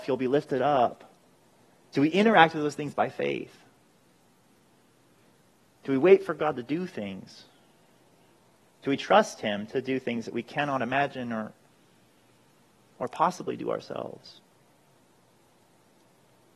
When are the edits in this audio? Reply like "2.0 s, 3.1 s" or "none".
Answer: none